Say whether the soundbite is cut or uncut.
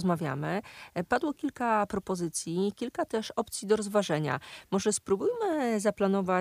uncut